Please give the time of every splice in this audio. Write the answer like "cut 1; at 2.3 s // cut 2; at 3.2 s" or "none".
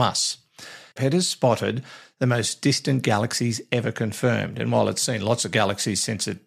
cut 1; at 1.0 s